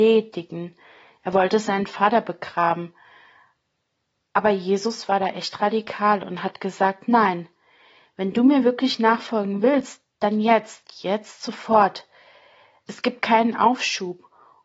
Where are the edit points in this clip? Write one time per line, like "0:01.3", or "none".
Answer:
none